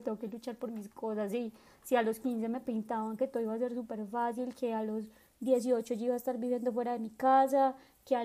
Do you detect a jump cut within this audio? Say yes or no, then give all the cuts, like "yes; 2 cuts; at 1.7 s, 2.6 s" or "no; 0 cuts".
no; 0 cuts